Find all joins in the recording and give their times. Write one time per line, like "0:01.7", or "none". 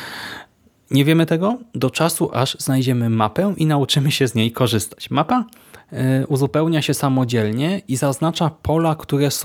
none